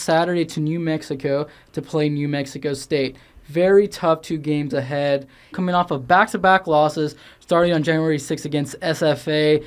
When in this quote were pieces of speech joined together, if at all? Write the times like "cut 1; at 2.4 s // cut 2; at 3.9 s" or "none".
cut 1; at 5.5 s